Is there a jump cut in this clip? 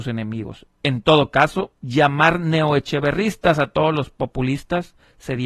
yes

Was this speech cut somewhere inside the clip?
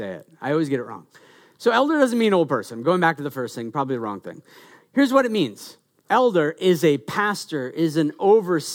no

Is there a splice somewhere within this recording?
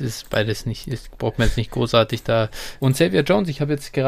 yes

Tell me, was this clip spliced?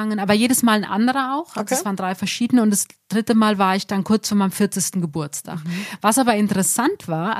no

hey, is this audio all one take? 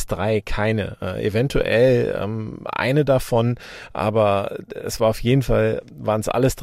yes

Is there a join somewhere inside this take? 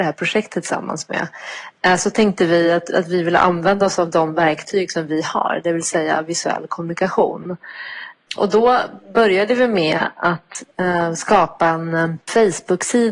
no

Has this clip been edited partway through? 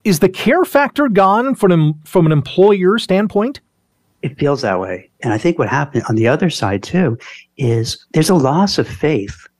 yes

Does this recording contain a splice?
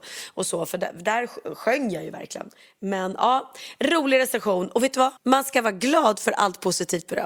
yes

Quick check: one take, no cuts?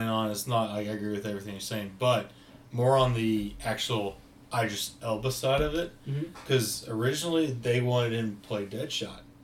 yes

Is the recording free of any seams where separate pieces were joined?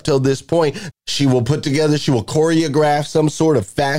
no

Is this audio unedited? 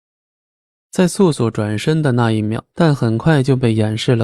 no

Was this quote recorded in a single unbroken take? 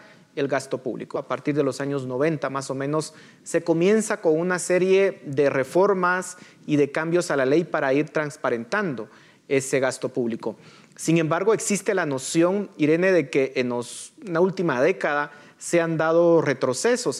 no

